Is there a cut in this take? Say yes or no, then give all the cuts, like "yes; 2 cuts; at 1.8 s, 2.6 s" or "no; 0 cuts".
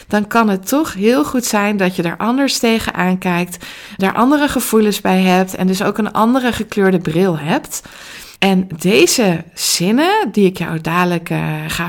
yes; 2 cuts; at 4.0 s, 8.4 s